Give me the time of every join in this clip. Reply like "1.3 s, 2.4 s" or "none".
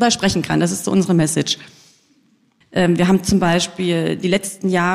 2.6 s